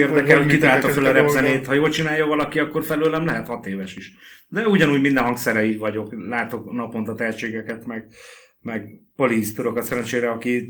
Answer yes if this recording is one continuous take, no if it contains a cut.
yes